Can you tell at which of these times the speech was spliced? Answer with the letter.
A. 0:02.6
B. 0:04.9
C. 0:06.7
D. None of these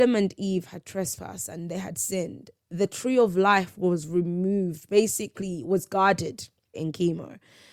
C